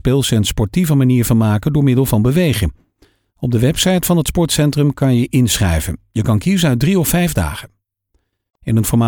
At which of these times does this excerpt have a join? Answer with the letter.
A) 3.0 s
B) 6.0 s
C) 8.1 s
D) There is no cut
D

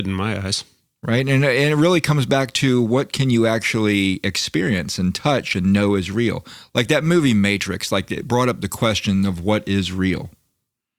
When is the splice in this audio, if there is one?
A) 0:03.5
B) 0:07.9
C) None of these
C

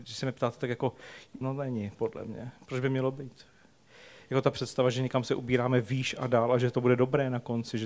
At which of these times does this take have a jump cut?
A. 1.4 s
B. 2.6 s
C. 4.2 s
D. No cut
A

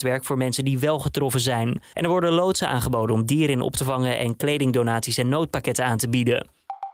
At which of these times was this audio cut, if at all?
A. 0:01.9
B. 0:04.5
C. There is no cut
A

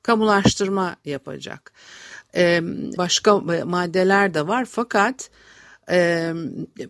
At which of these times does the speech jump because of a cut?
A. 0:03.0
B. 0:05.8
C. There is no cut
A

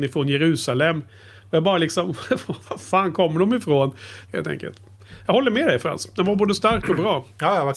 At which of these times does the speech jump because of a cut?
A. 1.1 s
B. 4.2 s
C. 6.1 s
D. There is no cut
B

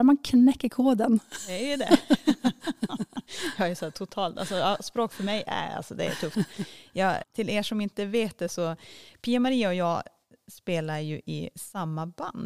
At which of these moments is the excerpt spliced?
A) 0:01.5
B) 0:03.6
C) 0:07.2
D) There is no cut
C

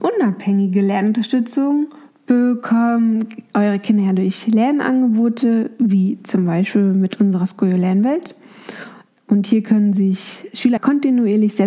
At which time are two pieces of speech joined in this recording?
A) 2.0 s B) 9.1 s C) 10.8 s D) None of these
C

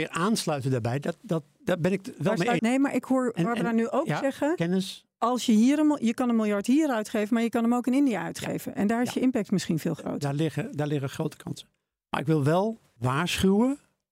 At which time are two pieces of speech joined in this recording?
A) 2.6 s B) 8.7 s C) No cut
A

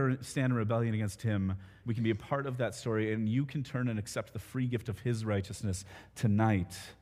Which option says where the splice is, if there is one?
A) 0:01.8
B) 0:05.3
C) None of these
A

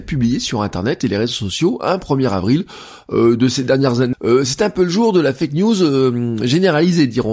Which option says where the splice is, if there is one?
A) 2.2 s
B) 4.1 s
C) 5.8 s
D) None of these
B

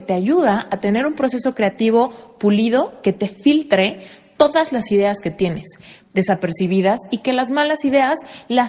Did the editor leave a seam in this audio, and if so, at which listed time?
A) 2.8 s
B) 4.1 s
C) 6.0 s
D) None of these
C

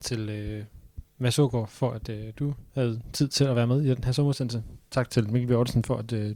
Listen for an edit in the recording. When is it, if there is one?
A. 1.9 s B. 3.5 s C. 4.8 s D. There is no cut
D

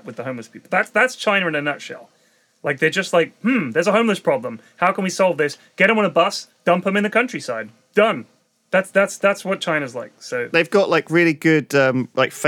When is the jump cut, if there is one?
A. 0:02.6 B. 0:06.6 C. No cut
C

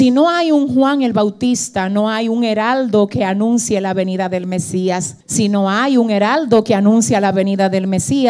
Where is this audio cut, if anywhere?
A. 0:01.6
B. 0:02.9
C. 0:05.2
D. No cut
C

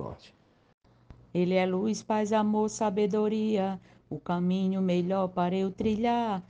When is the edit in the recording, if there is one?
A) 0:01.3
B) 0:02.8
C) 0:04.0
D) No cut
A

